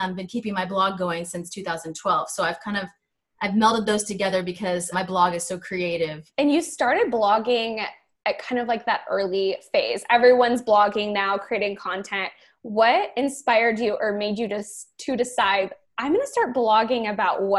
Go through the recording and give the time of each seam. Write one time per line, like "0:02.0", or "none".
0:04.9
0:06.3